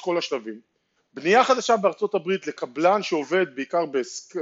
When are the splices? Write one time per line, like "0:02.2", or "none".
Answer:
0:01.0